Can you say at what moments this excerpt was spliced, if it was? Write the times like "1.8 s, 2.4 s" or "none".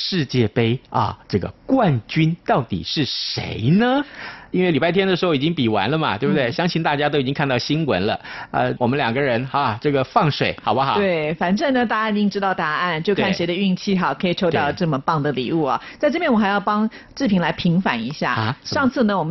8.8 s